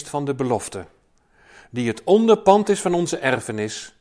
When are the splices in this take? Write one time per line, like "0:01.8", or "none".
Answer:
none